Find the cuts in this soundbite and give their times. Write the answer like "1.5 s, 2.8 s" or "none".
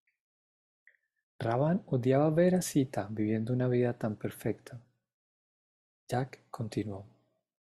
5.9 s